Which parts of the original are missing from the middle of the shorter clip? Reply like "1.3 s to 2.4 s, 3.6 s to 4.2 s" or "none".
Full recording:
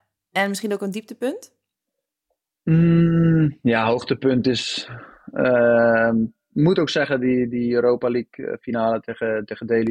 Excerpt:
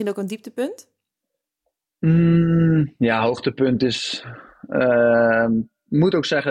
none